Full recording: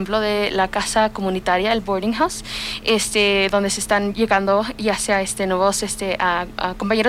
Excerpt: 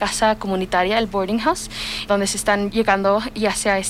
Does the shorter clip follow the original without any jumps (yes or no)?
no